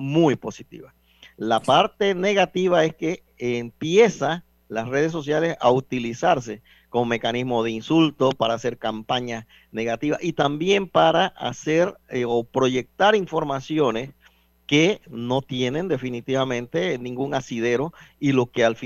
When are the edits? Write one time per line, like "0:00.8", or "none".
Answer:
none